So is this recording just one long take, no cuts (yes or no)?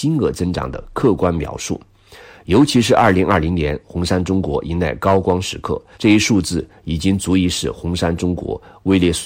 no